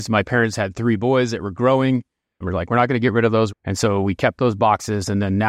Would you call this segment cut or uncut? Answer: cut